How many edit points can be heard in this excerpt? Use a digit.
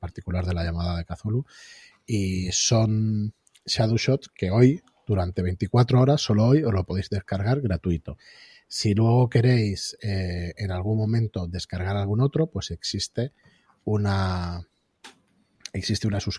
0